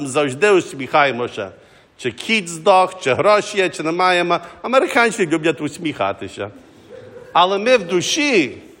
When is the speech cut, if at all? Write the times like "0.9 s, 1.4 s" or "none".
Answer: none